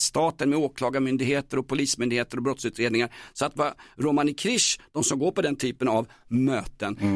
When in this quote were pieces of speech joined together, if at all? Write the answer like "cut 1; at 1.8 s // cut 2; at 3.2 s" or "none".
none